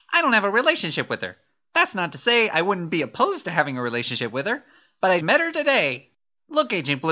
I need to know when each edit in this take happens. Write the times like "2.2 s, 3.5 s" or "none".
5.2 s